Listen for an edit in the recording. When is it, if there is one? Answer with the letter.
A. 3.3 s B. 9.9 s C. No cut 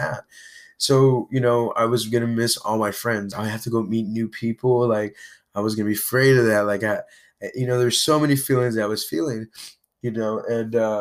A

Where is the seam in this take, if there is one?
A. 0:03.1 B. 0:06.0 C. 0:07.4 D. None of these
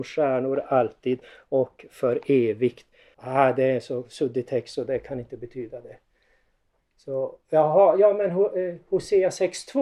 A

